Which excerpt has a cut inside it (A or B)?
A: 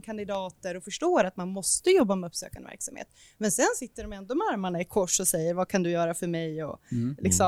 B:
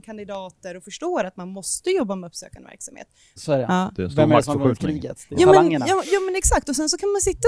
B